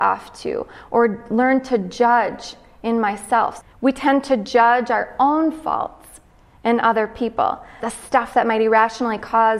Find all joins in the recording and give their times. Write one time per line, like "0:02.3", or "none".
0:03.6
0:07.8